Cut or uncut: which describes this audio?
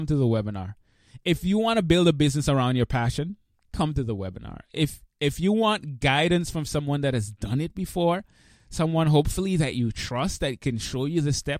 uncut